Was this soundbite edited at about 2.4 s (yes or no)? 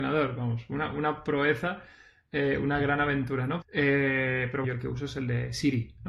no